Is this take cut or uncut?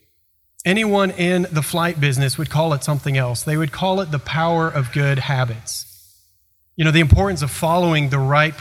uncut